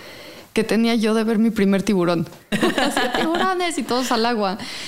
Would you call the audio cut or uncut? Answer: cut